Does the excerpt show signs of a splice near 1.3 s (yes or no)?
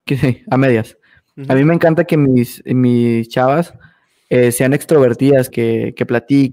no